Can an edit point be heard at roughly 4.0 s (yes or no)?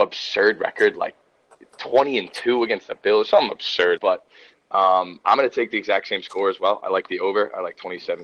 yes